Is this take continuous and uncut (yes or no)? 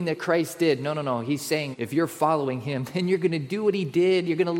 no